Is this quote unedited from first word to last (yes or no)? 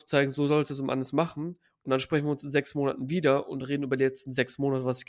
yes